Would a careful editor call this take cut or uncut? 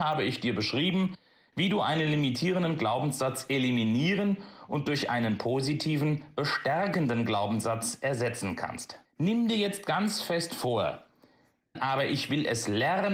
cut